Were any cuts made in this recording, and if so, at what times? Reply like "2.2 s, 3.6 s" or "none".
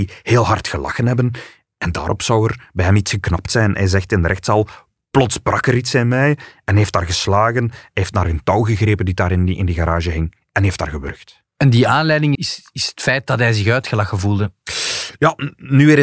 12.3 s